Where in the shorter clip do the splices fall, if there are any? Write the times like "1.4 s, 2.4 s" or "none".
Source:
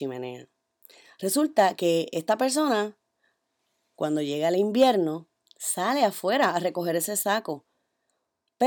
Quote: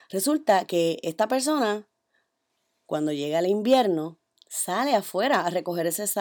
none